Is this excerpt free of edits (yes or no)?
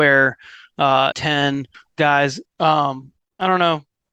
no